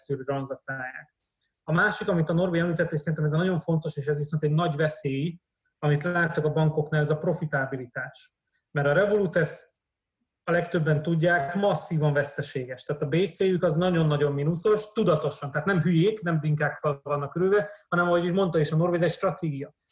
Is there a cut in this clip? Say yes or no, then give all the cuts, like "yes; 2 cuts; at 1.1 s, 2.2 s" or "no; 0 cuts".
no; 0 cuts